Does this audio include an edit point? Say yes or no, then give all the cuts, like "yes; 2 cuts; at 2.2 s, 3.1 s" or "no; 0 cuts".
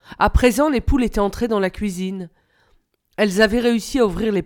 no; 0 cuts